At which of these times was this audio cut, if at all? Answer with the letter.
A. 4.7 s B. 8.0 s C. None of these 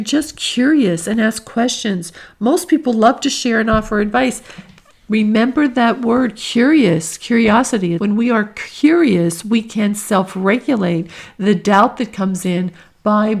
B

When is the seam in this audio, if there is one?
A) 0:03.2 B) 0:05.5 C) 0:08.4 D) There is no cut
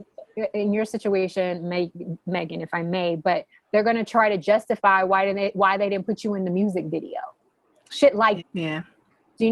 C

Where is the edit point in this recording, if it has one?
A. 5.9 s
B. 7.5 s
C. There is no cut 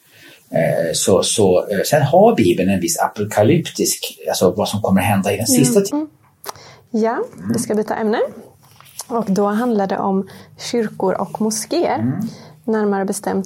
A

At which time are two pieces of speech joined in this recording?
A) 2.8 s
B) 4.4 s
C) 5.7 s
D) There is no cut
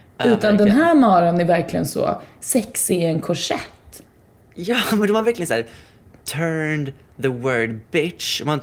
D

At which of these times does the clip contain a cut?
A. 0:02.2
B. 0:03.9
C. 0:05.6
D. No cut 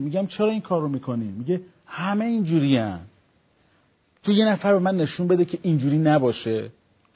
D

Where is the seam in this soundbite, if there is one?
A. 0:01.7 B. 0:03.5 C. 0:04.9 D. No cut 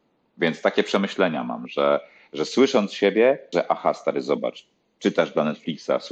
B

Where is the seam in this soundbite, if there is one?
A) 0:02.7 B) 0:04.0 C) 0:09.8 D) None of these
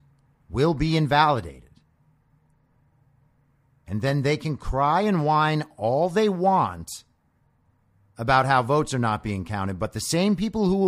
D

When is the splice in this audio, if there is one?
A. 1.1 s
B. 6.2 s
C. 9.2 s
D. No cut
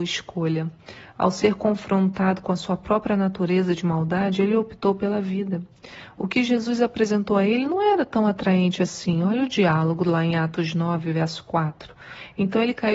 D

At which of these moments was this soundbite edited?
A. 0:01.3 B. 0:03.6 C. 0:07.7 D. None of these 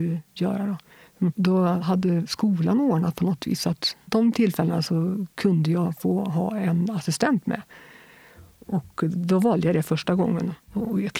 A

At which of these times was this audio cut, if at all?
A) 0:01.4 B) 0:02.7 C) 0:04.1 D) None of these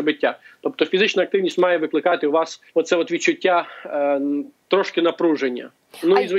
B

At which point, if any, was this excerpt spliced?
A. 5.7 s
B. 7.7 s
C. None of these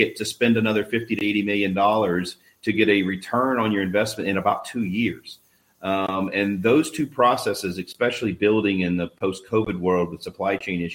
A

